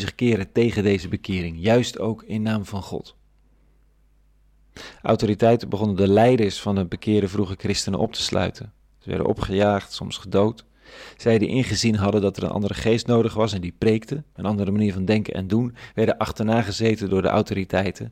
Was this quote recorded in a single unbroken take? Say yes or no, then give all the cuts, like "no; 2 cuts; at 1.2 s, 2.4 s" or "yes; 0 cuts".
yes; 0 cuts